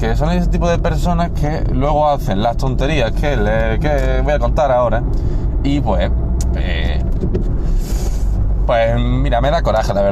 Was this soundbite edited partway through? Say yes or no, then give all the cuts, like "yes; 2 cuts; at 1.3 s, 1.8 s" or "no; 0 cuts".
no; 0 cuts